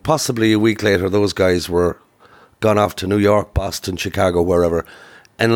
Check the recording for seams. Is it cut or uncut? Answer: uncut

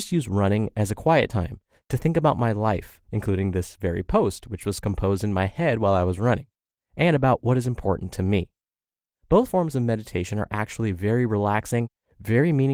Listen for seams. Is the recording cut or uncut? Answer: cut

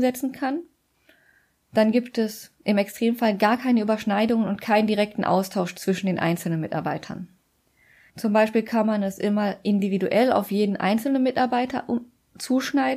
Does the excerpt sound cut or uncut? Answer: cut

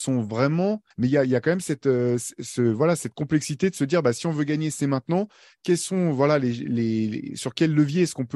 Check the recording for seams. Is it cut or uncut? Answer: cut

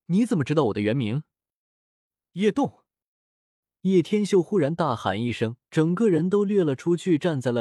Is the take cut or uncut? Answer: cut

